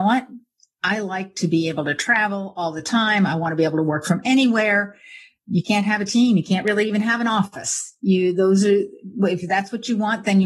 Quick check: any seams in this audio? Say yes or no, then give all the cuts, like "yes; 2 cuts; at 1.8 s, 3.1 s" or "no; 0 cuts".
no; 0 cuts